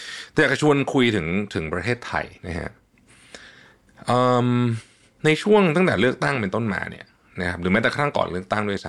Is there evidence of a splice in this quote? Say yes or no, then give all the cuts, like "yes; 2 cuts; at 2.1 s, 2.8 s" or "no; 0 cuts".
yes; 1 cut; at 2.4 s